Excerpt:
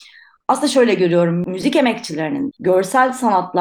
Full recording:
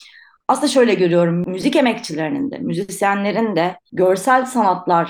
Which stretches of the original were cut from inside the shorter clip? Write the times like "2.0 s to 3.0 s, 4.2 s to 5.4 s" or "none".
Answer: 2.5 s to 3.8 s